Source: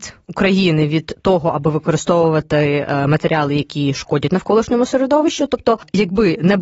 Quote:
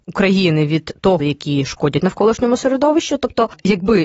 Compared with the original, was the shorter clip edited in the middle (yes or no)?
yes